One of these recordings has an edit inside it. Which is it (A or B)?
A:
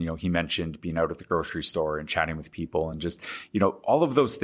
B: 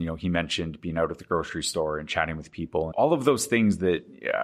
B